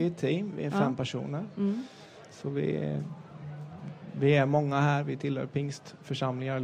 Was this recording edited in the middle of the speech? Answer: no; 0 cuts

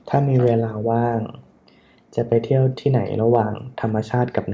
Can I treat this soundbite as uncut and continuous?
yes; 0 cuts

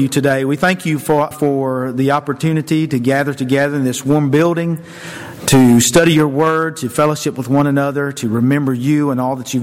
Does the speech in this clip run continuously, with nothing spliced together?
no; 1 cut; at 1.3 s

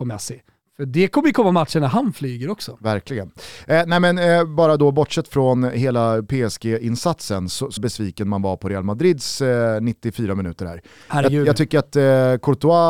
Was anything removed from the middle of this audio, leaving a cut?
yes; 1 cut; at 7.8 s

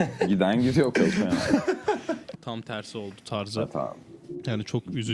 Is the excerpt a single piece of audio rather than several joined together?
no; 2 cuts; at 0.9 s, 2.3 s

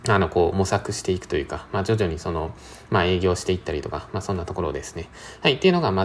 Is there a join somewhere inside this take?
no; 0 cuts

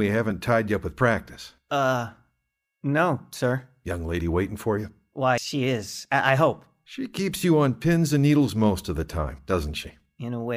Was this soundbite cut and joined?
yes; 1 cut; at 5.4 s

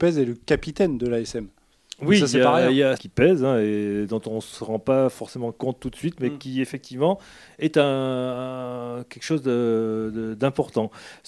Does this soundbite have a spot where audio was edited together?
yes; 1 cut; at 3.0 s

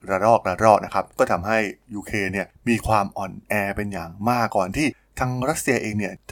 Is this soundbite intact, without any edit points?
no; 1 cut; at 4.5 s

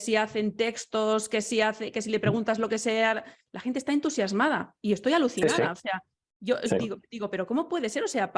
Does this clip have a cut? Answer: no; 0 cuts

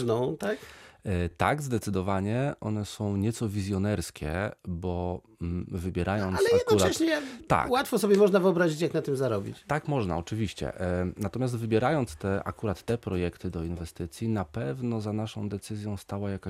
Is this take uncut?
yes; 0 cuts

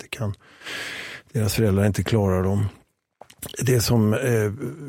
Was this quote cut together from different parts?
no; 0 cuts

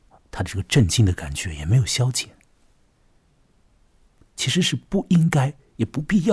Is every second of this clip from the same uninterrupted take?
no; 1 cut; at 3.5 s

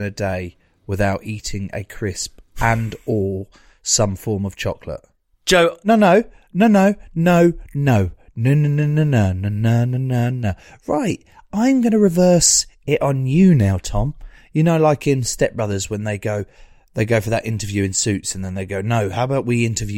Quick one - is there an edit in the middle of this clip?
no; 0 cuts

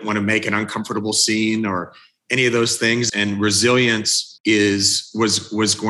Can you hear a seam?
yes; 2 cuts; at 3.1 s, 4.4 s

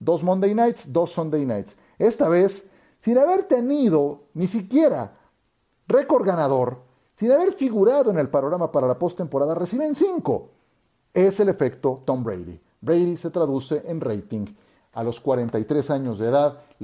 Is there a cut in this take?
no; 0 cuts

